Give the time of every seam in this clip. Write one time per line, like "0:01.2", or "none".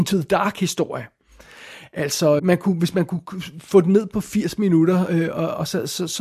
0:02.4